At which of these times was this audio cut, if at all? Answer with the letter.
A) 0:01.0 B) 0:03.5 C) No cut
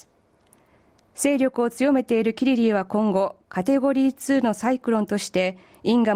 C